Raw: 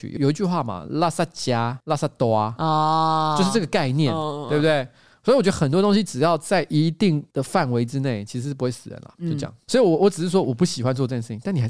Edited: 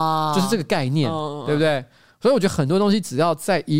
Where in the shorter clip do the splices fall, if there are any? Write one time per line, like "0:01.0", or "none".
none

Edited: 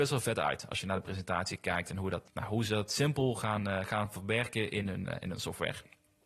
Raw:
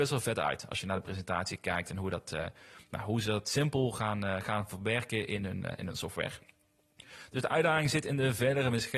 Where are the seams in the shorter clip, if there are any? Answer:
0:02.3

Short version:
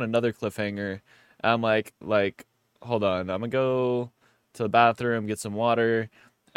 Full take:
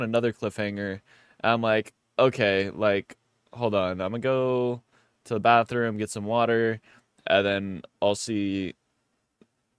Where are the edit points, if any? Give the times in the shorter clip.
0:02.0

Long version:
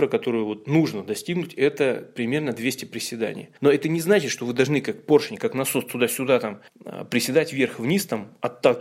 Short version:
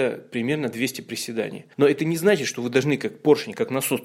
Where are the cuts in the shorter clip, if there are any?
none

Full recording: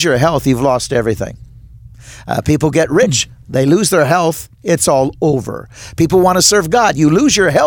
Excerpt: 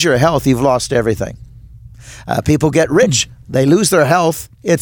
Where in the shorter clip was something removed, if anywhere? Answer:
none

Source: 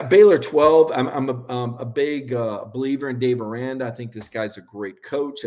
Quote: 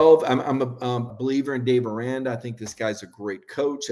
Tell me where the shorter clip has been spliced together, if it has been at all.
0:01.1

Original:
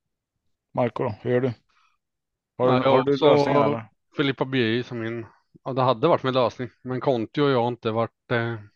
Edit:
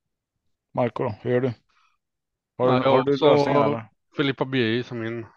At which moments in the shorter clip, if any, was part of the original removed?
none

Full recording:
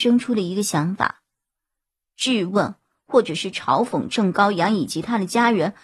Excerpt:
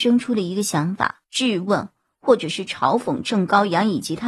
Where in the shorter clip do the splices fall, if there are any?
0:01.2

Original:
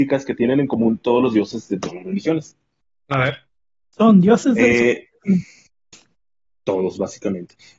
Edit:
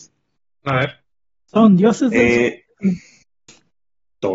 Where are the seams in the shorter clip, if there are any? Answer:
none

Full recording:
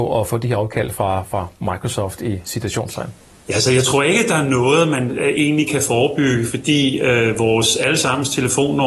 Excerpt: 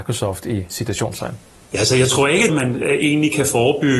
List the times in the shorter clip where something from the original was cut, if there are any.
0:02.5

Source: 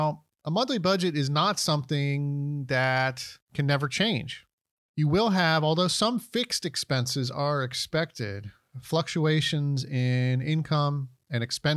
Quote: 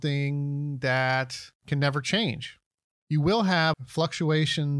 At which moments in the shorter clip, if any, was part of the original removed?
0:03.7

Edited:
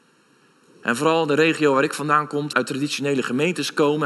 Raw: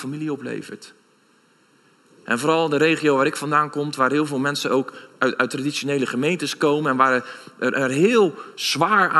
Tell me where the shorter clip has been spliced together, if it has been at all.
0:02.5

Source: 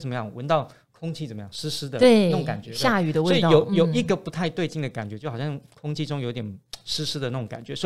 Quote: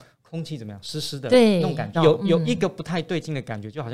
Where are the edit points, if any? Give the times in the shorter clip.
0:01.9

